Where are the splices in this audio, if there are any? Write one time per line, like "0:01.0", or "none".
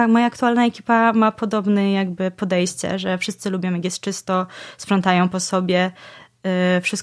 none